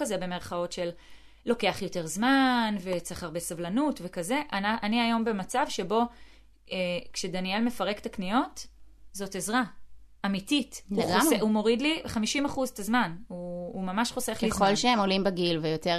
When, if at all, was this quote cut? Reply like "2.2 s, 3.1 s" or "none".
none